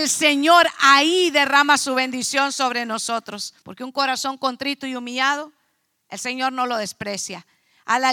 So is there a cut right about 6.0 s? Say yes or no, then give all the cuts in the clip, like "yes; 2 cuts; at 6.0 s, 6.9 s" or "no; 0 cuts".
no; 1 cut; at 3.6 s